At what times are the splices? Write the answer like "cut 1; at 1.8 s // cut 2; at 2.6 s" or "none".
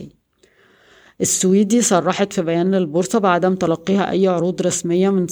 none

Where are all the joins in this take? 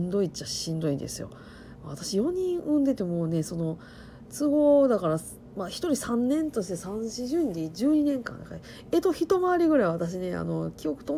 none

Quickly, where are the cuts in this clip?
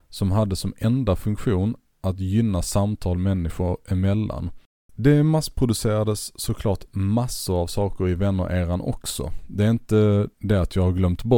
cut 1; at 10.3 s

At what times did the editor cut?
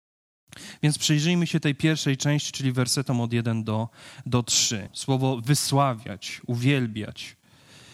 cut 1; at 4.9 s

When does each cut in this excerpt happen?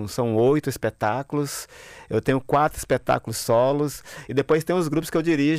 none

